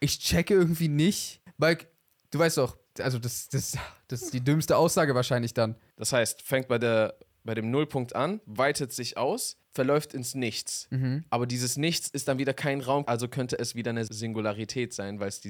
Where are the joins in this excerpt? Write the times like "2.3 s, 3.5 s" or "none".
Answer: 5.9 s, 13.1 s